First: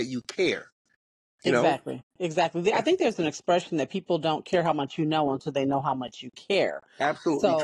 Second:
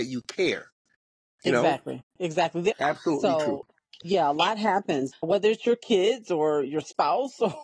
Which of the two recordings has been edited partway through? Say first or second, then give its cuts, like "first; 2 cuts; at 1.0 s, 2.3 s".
second; 2 cuts; at 2.7 s, 5.1 s